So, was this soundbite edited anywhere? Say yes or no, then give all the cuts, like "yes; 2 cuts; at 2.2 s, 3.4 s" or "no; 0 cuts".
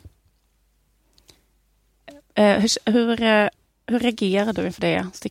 no; 0 cuts